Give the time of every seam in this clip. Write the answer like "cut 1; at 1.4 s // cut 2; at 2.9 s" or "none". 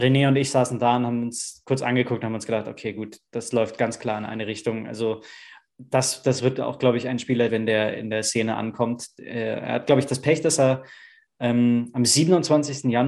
cut 1; at 7.5 s